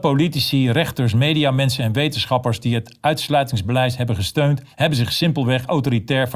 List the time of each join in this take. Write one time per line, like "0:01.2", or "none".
0:04.7